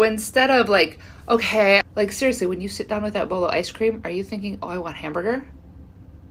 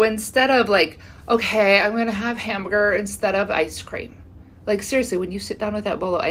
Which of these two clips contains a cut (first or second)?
first